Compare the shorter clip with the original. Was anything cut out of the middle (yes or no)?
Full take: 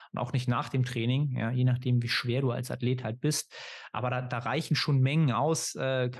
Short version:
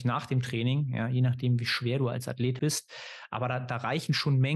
yes